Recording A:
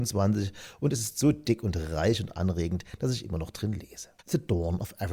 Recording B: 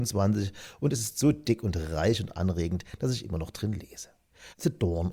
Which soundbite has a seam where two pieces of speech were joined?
A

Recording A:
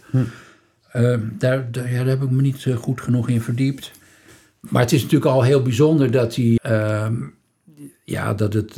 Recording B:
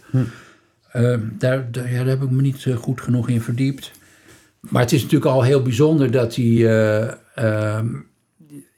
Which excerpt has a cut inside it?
A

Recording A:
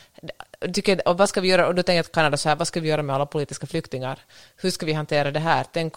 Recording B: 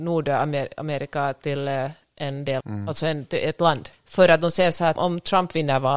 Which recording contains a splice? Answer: B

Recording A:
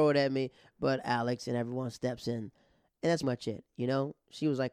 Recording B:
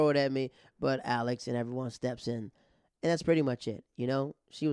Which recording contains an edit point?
A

